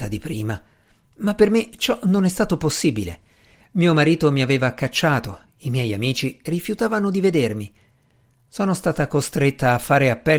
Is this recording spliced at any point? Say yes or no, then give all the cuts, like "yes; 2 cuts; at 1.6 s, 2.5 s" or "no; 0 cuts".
no; 0 cuts